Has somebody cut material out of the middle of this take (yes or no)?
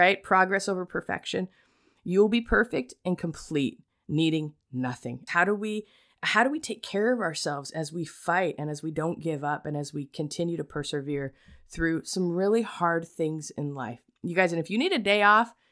yes